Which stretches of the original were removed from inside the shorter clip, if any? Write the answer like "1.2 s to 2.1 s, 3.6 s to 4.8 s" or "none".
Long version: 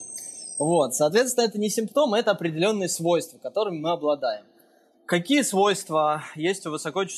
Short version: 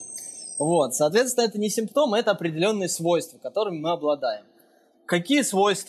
none